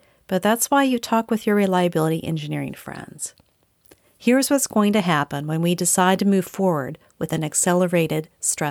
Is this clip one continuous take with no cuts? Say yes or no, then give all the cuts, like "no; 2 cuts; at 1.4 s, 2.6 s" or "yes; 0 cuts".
yes; 0 cuts